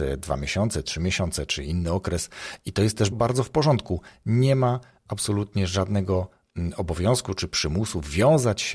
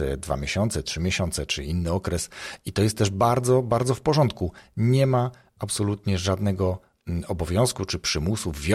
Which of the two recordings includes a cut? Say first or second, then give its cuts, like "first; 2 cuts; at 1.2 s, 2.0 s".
first; 1 cut; at 3.1 s